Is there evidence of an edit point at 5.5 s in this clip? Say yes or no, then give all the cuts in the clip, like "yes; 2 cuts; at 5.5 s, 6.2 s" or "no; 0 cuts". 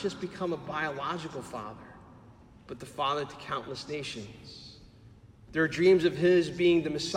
yes; 1 cut; at 5.5 s